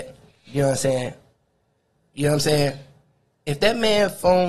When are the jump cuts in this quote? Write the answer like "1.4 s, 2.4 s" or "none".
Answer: 2.1 s